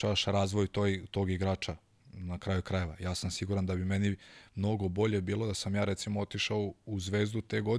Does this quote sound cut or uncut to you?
uncut